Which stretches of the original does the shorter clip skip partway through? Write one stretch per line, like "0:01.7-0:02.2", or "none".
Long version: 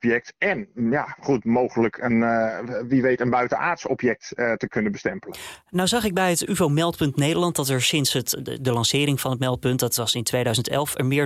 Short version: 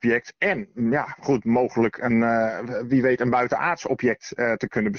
none